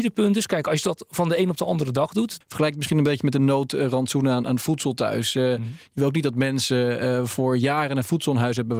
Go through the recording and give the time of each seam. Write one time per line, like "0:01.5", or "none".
0:02.4